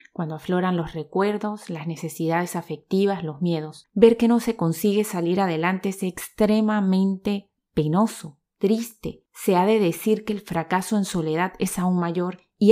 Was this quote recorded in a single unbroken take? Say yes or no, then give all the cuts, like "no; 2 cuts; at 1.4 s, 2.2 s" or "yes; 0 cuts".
no; 1 cut; at 3.8 s